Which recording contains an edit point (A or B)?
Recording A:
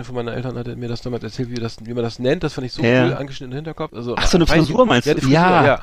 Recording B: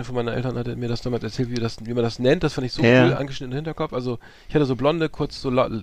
A